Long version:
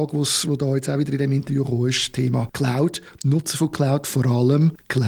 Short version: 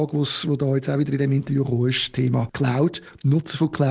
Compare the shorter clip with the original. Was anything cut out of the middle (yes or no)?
no